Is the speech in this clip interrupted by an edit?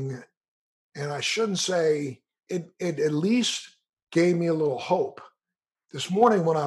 yes; 1 cut; at 2.5 s

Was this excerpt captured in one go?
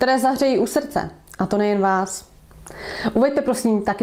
yes; 0 cuts

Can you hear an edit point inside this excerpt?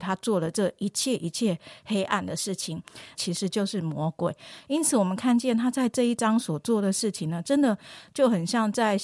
yes; 1 cut; at 3.1 s

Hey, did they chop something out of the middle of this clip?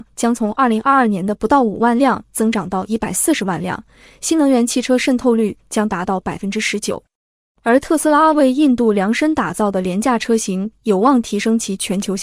no; 0 cuts

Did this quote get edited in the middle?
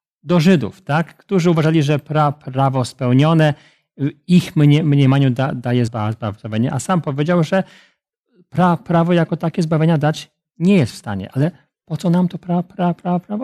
yes; 1 cut; at 5.9 s

